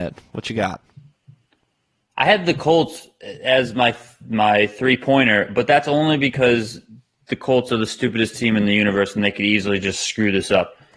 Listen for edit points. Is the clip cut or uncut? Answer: uncut